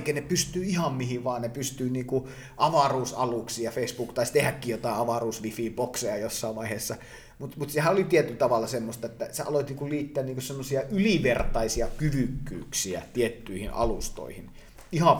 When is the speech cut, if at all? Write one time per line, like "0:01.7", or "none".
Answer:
none